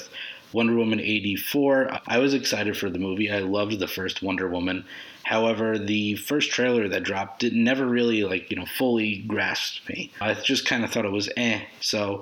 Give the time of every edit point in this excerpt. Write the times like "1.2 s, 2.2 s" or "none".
2.0 s